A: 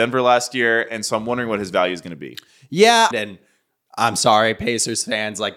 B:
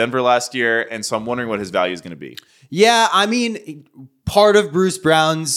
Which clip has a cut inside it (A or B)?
A